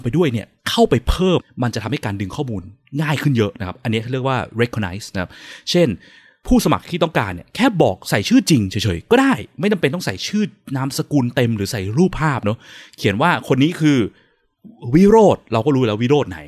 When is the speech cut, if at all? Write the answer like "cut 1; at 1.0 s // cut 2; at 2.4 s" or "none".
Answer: cut 1; at 1.4 s